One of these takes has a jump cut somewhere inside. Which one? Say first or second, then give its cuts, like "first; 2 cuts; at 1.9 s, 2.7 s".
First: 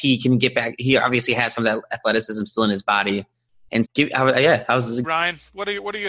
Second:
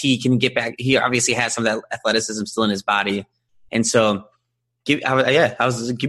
first; 2 cuts; at 3.8 s, 5.0 s